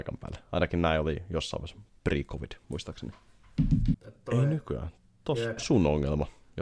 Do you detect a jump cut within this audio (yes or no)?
yes